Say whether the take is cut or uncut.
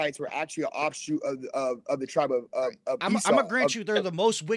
uncut